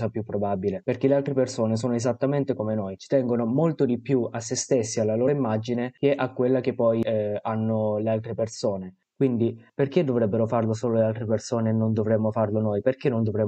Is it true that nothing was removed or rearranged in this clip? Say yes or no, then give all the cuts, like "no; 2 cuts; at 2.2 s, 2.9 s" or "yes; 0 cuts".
yes; 0 cuts